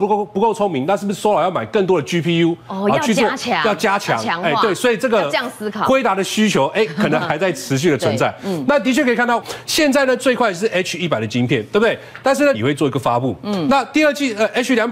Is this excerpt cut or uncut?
cut